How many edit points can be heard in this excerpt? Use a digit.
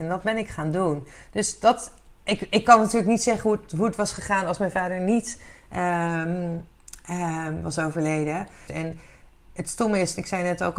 2